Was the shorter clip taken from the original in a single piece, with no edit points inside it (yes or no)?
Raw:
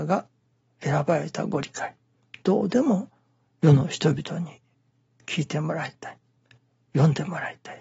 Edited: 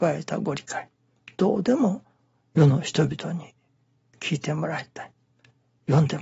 yes